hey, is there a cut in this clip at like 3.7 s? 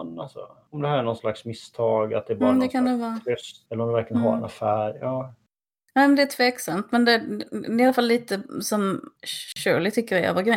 yes; 1 cut; at 3.7 s

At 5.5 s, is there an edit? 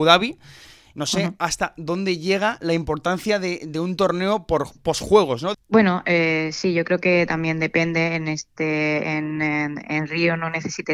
yes; 1 cut; at 5.5 s

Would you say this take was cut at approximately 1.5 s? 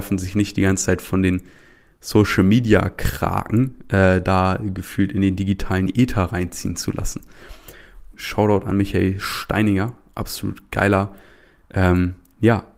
no; 1 cut; at 8.1 s

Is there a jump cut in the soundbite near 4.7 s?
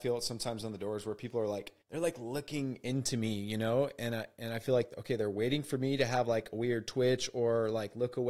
no; 1 cut; at 1.8 s

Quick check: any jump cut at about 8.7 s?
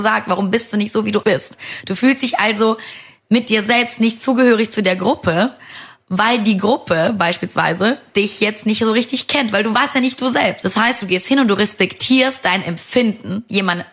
no; 2 cuts; at 1.2 s, 10.6 s

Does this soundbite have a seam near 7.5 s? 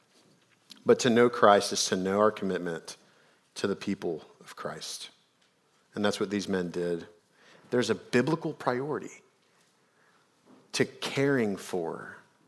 yes; 1 cut; at 7.5 s

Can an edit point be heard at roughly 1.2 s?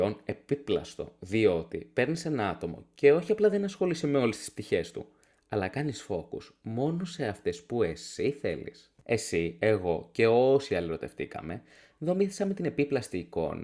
no; 1 cut; at 9.0 s

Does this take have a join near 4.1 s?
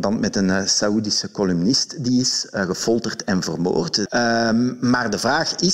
yes; 1 cut; at 4.1 s

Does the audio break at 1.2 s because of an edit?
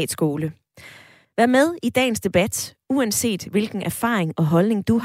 yes; 1 cut; at 1.2 s

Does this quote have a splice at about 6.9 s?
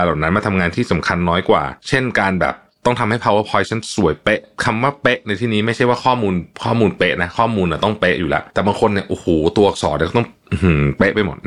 no; 0 cuts

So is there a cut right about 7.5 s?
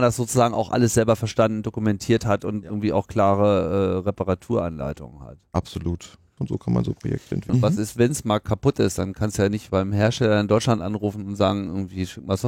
yes; 2 cuts; at 6.4 s, 7.5 s

